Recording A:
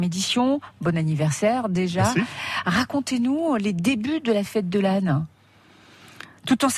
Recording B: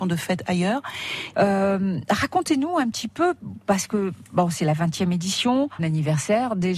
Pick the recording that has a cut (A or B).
B